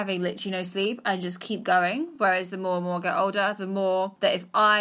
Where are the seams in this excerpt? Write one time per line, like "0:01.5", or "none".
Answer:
none